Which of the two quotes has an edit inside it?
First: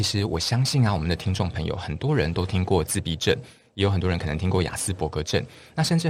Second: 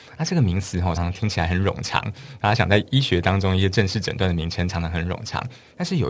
second; 1 cut; at 1.0 s

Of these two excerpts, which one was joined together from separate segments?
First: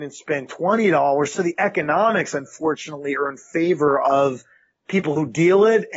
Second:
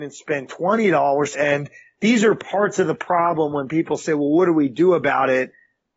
second; 1 cut; at 1.3 s

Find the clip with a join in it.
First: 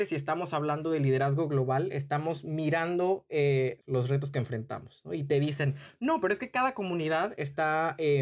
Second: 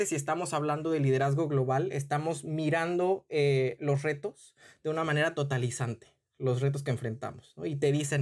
first; 1 cut; at 3.8 s

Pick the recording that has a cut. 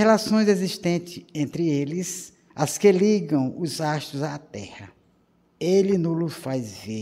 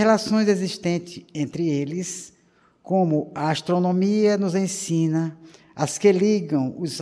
first; 1 cut; at 2.5 s

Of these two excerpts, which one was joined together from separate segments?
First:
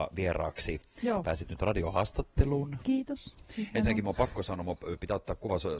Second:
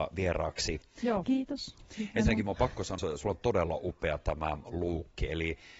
second; 2 cuts; at 1.2 s, 3.0 s

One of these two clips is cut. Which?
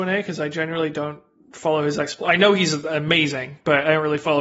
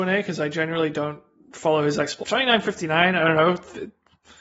second; 1 cut; at 2.2 s

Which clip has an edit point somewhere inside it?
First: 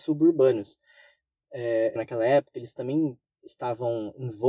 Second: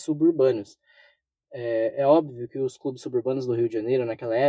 first; 1 cut; at 2.0 s

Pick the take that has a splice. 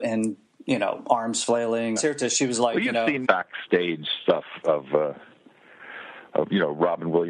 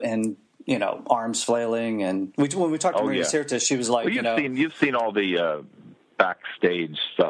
first; 2 cuts; at 2.0 s, 3.2 s

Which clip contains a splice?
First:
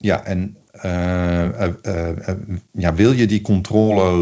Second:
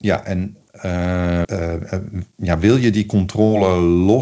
second; 1 cut; at 1.4 s

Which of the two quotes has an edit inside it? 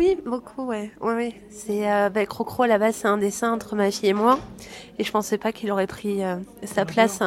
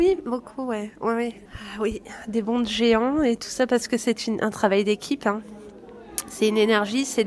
second; 1 cut; at 1.5 s

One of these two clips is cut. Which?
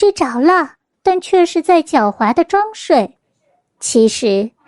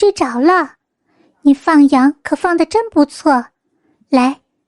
first; 1 cut; at 0.9 s

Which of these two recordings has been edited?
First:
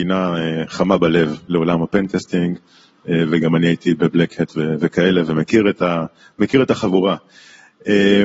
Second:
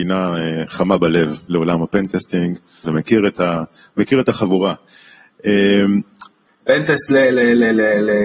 second; 2 cuts; at 2.8 s, 6.5 s

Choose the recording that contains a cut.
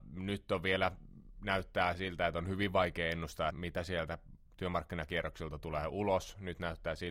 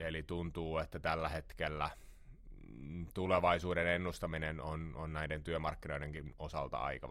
first; 1 cut; at 3.5 s

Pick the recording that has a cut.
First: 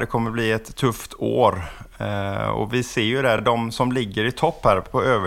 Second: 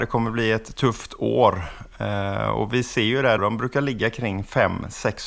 second; 1 cut; at 3.4 s

